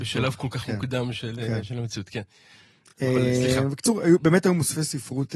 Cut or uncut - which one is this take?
uncut